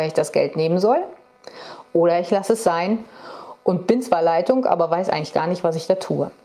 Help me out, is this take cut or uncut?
uncut